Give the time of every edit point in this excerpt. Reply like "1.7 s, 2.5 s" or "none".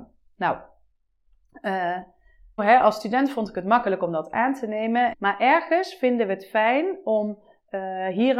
2.6 s, 5.1 s